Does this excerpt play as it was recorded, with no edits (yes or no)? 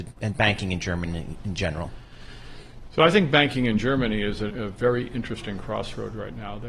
no